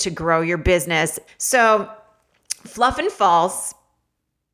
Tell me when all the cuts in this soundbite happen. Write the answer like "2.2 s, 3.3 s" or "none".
1.3 s